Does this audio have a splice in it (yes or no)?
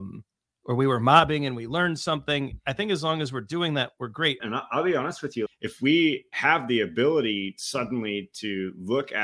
yes